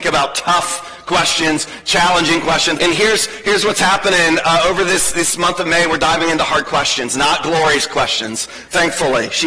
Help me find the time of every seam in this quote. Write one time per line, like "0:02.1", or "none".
0:02.8